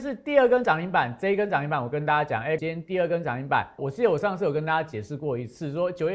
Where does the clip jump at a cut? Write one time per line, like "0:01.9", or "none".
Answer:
0:02.6
0:03.8